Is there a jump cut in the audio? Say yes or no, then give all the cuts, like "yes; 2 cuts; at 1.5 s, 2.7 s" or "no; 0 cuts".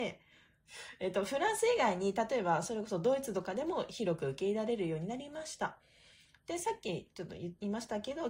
no; 0 cuts